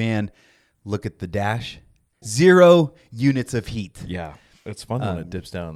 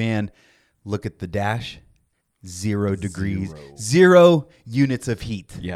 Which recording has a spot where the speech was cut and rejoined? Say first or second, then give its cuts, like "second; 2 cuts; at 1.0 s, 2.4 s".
first; 1 cut; at 2.2 s